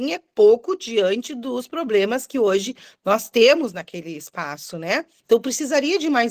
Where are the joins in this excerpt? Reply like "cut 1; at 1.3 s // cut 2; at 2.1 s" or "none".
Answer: cut 1; at 5.2 s